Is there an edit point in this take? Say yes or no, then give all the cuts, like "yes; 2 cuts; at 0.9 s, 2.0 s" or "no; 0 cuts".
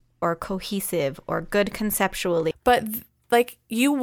yes; 1 cut; at 2.5 s